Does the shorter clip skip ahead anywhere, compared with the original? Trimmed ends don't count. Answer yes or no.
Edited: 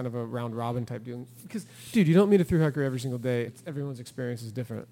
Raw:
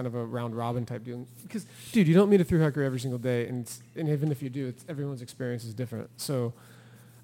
yes